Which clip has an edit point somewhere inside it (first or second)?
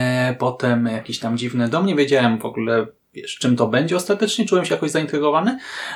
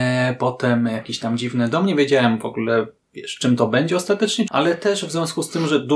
second